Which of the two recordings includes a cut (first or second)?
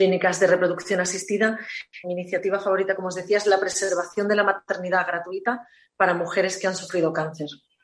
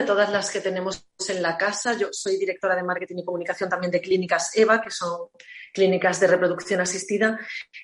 first